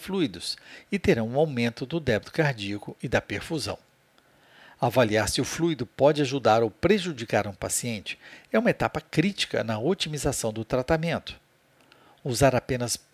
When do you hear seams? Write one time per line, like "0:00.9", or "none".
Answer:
none

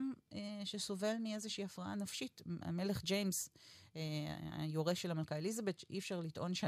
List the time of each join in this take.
none

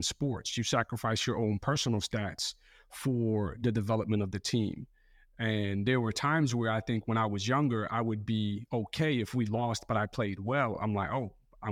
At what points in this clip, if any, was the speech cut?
none

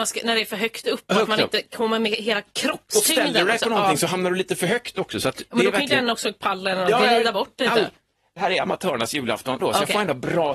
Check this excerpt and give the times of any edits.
0:09.6

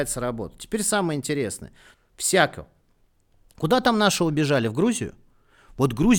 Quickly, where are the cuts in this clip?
0:01.9

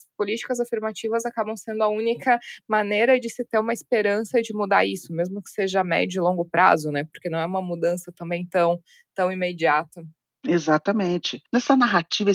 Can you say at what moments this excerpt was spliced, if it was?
none

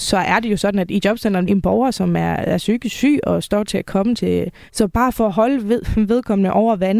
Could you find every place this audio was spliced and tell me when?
0:01.5
0:04.7

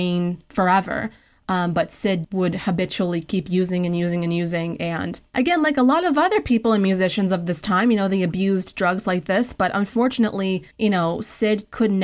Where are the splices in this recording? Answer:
0:02.2
0:10.7

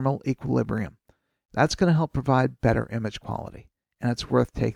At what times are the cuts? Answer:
none

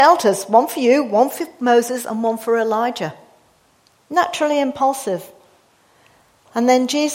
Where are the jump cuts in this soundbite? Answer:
none

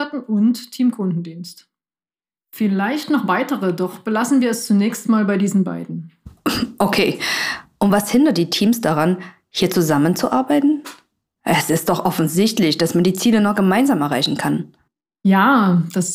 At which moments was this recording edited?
none

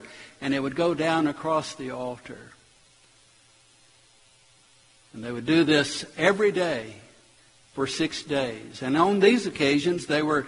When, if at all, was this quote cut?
none

